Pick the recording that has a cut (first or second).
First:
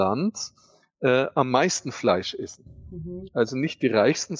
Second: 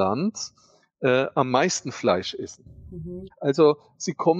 second